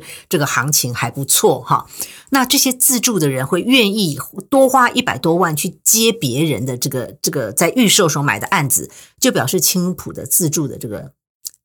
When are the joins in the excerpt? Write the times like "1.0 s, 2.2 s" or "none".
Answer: none